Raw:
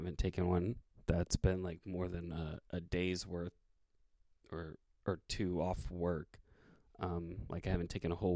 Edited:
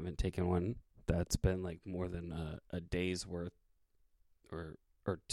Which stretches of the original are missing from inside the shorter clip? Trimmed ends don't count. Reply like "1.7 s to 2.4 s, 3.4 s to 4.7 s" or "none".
none